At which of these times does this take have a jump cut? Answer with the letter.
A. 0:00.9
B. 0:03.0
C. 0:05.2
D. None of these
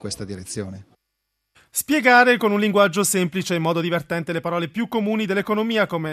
D